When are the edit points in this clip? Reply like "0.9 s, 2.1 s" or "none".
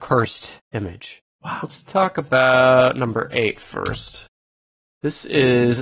1.3 s